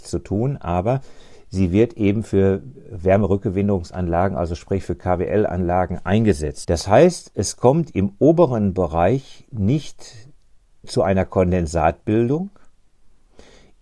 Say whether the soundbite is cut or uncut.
cut